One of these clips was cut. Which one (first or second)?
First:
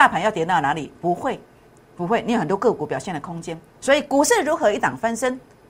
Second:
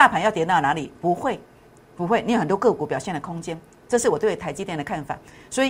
first